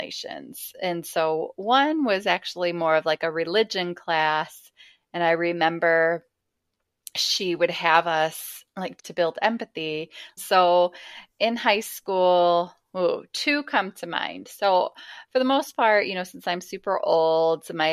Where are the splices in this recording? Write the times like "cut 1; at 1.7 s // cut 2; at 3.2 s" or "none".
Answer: cut 1; at 9.0 s // cut 2; at 10.4 s